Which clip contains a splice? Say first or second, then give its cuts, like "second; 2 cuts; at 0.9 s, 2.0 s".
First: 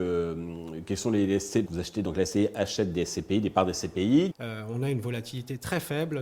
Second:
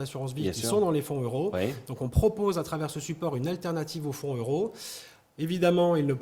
first; 2 cuts; at 1.7 s, 4.3 s